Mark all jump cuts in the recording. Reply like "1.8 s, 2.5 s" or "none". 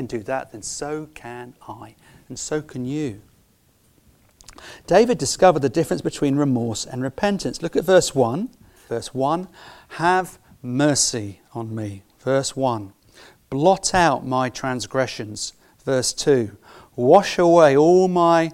8.9 s